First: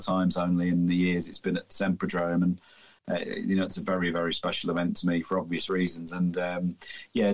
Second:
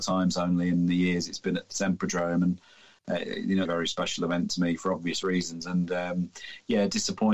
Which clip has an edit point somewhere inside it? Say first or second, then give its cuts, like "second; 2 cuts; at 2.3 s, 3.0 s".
second; 1 cut; at 3.7 s